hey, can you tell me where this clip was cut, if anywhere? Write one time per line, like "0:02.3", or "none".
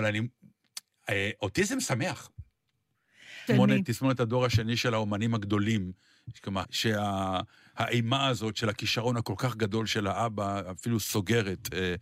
0:03.5
0:06.6

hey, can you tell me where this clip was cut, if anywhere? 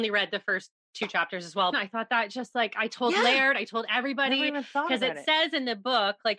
0:01.7

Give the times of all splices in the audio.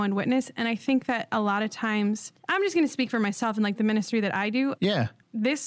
0:04.8

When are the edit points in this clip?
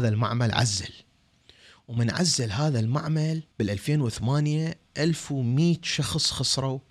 0:03.5

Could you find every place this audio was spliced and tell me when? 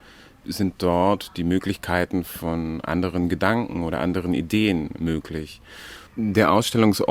0:06.1

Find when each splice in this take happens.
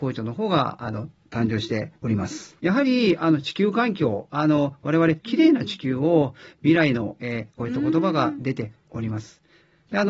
0:02.6
0:05.2
0:07.6

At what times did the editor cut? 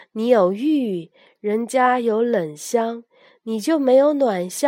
0:01.4

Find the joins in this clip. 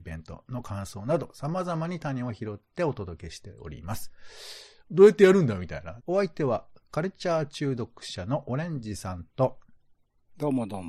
0:04.8
0:06.0

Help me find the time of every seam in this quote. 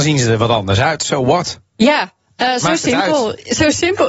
none

